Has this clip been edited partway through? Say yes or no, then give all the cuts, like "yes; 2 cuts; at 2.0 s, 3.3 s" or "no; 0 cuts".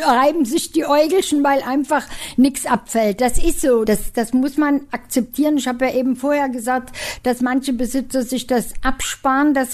yes; 1 cut; at 3.9 s